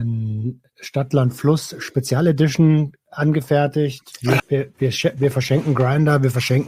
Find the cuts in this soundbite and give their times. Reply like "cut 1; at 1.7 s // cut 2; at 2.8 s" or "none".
cut 1; at 4.4 s